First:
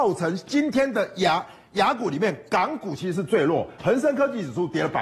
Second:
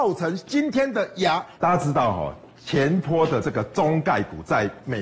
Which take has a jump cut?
second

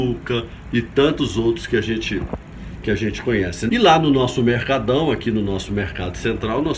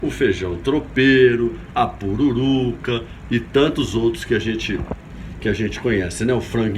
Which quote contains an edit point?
first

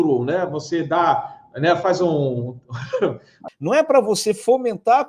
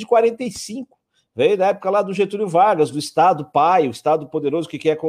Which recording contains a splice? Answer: first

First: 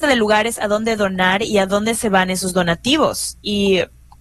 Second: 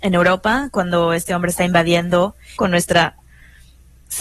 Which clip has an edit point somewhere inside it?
second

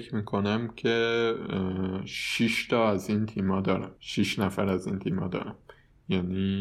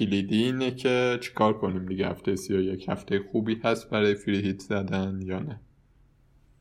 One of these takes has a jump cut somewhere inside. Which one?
first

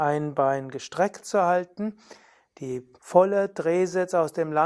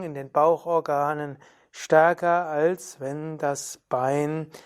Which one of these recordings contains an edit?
first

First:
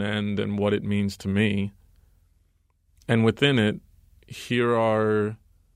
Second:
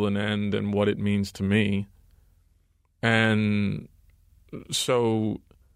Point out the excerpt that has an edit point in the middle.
second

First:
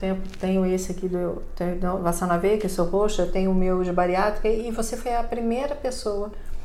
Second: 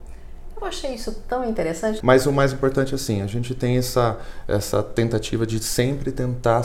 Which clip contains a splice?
second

